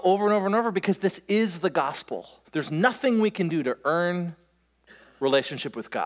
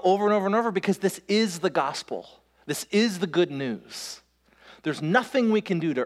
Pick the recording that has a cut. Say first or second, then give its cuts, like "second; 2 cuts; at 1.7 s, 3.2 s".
first; 1 cut; at 2.4 s